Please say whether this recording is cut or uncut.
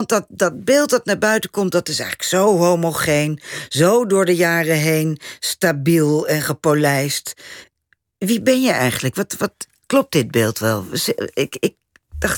uncut